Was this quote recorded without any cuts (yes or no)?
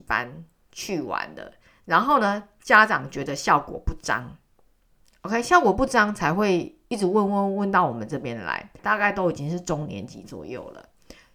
no